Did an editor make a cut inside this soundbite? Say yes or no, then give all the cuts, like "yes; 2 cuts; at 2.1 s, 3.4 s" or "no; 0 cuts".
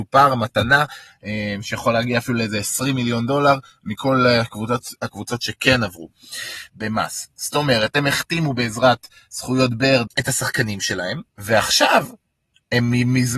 yes; 3 cuts; at 6.7 s, 10.1 s, 11.3 s